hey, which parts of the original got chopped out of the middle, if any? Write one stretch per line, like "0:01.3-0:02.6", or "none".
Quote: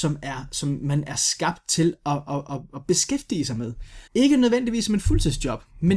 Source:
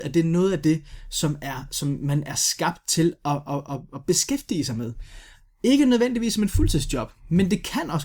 0:05.3-0:05.5